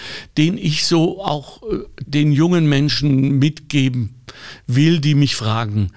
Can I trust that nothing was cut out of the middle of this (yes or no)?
no